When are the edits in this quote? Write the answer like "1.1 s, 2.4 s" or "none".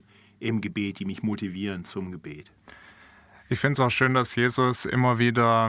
none